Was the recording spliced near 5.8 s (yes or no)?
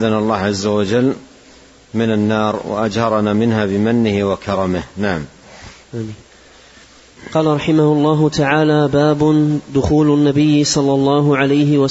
yes